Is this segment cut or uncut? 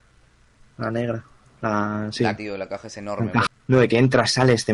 cut